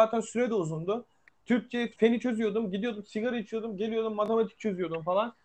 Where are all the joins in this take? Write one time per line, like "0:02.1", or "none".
0:01.9